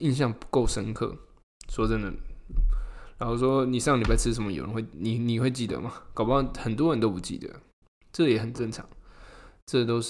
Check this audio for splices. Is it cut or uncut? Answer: uncut